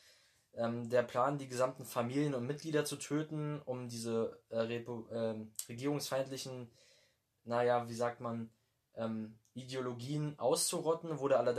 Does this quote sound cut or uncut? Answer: uncut